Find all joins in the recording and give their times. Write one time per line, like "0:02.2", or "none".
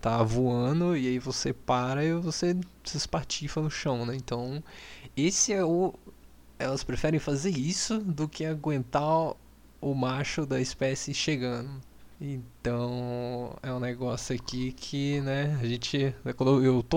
0:12.1